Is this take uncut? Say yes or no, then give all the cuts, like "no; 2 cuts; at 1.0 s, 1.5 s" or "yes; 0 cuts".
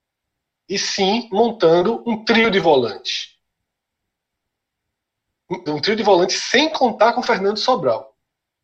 no; 1 cut; at 5.7 s